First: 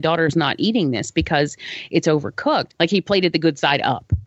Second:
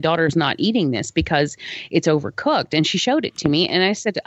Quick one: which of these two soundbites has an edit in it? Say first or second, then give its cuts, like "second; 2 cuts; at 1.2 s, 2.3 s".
first; 1 cut; at 2.7 s